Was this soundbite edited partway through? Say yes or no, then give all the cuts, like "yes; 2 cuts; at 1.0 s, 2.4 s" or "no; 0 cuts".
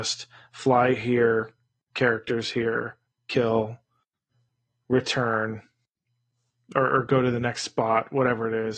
no; 0 cuts